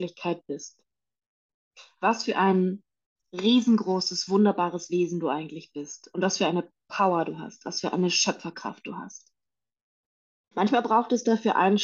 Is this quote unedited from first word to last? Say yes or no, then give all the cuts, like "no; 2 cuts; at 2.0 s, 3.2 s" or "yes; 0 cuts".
no; 1 cut; at 10.5 s